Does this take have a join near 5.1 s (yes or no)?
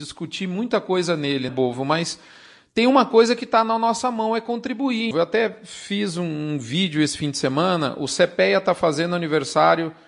yes